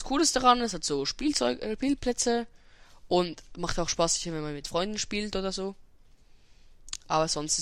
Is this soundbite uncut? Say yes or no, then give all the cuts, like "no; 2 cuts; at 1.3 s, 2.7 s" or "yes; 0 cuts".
yes; 0 cuts